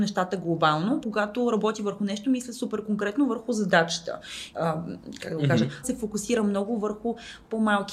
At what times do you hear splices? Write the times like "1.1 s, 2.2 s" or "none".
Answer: 1.0 s, 4.5 s, 5.8 s

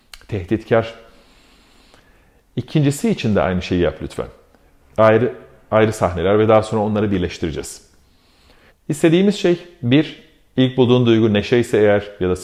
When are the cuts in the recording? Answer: 4.8 s, 8.7 s

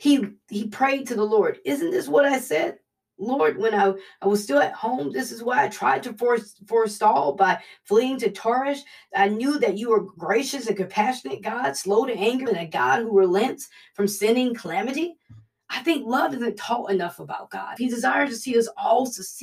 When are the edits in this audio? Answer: 12.5 s, 17.8 s

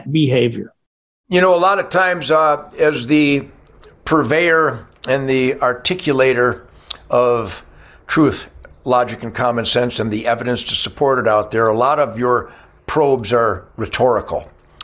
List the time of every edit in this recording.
none

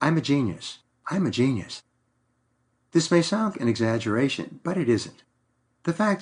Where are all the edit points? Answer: 1.0 s, 3.5 s

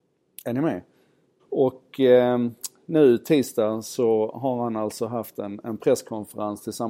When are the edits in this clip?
1.4 s

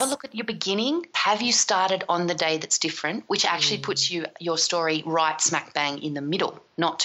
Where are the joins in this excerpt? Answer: 1.1 s, 3.3 s

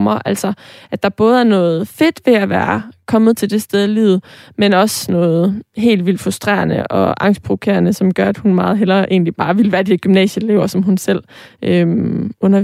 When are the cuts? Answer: none

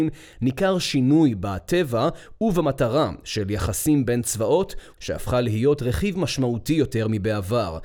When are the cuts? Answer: 5.0 s

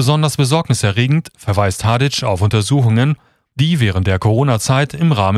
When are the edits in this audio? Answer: none

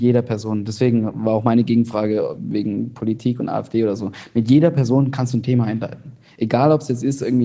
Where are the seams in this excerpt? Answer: none

